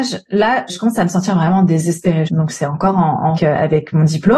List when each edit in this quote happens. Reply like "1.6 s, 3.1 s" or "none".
2.3 s, 3.4 s